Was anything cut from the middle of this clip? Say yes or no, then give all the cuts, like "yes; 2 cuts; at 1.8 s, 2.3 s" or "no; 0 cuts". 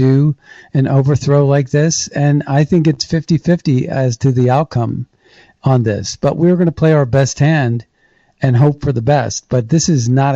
no; 0 cuts